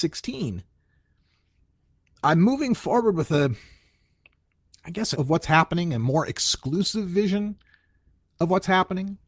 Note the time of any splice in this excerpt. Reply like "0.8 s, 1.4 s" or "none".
5.1 s

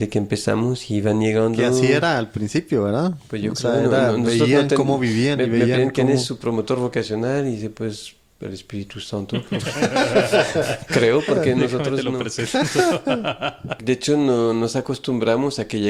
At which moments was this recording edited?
13.8 s

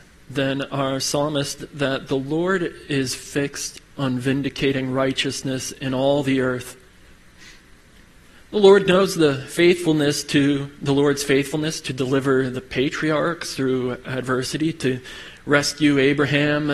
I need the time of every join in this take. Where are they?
none

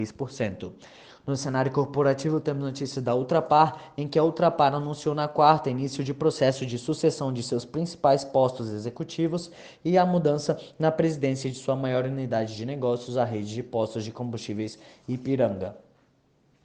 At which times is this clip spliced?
none

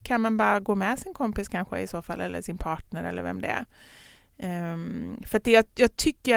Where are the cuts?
none

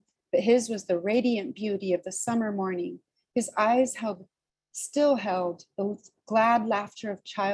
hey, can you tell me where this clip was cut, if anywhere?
none

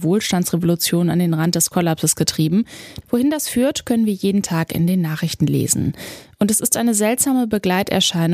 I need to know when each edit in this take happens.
3.0 s

